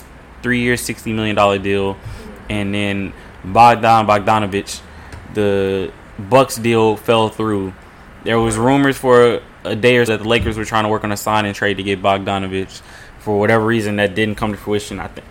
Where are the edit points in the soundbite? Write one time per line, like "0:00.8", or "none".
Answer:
0:10.1